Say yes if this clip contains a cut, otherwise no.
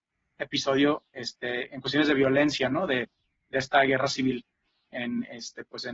no